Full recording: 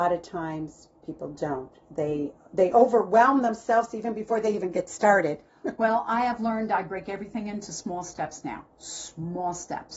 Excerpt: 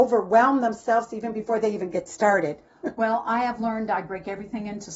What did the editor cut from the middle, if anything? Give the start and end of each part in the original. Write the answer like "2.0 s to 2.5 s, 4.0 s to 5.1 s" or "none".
none